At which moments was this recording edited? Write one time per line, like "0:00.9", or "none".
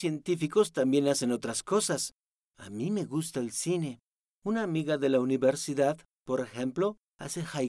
none